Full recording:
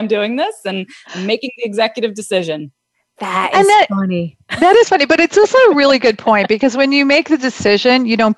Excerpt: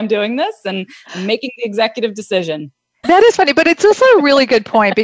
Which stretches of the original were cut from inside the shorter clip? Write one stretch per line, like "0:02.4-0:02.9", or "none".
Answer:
0:03.0-0:04.6